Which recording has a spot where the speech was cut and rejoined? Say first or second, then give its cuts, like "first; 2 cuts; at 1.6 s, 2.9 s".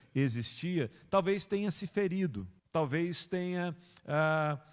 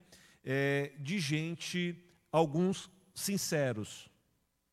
first; 1 cut; at 2.6 s